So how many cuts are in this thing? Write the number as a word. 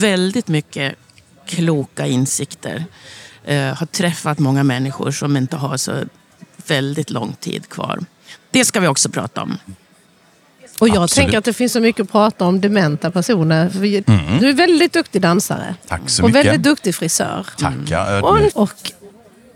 two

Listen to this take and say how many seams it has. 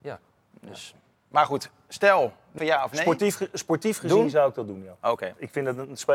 one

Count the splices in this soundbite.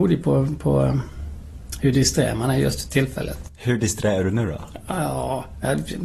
one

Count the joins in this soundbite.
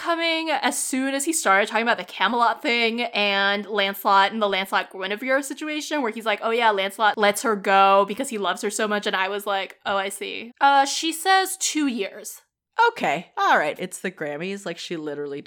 two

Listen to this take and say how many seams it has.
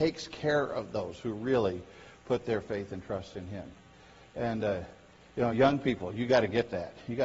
zero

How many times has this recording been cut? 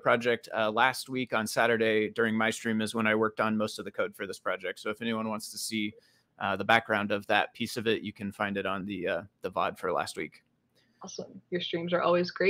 zero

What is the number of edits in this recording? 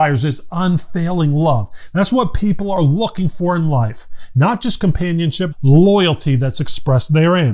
one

